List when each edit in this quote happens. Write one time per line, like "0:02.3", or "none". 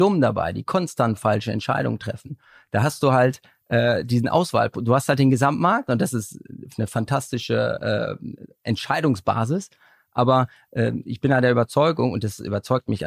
none